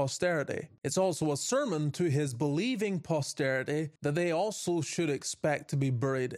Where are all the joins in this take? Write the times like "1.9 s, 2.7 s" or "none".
4.0 s